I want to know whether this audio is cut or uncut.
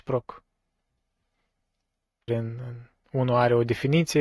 cut